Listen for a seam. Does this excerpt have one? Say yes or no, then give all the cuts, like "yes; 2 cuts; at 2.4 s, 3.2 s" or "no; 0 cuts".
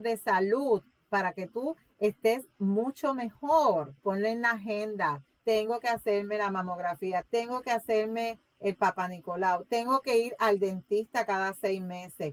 yes; 2 cuts; at 4.0 s, 7.2 s